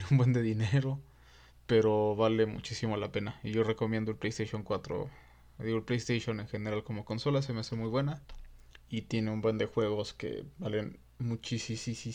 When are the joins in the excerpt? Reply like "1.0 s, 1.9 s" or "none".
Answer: none